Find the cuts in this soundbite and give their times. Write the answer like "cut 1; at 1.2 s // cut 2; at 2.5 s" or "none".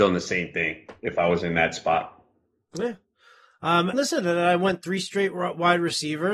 cut 1; at 3.9 s